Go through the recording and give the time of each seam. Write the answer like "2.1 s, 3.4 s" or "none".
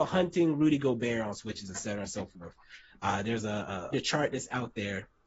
3.9 s